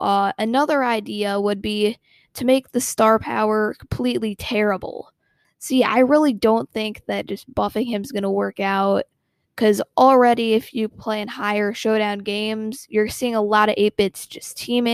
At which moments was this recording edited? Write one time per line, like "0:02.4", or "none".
0:05.4